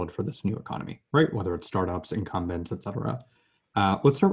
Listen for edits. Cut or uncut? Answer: uncut